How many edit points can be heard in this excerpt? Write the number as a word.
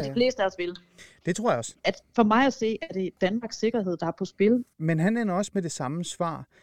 two